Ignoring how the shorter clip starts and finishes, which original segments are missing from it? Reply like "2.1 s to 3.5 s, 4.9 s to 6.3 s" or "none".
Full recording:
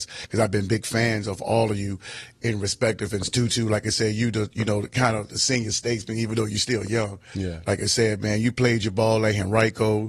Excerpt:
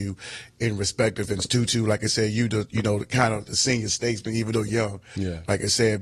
6.5 s to 6.9 s